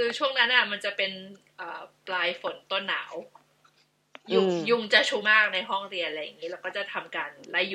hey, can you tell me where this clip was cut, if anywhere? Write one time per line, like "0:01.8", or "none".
0:05.2